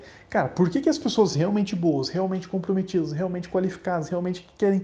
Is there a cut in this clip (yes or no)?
no